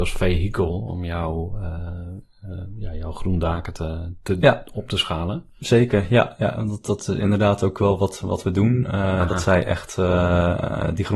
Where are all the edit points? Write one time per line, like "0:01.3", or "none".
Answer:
none